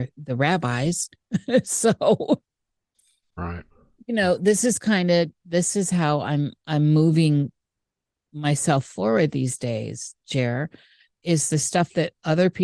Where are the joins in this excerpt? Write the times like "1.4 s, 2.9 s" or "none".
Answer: none